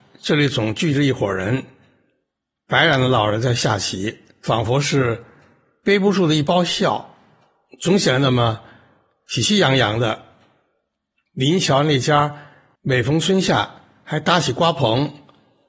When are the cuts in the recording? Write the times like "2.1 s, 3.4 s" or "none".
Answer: 4.4 s